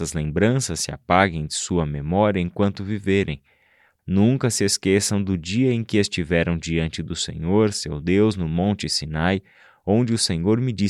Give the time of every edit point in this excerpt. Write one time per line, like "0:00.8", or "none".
0:04.0